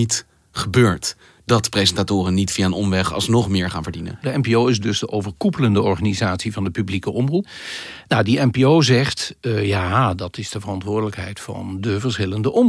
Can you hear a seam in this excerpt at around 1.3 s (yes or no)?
no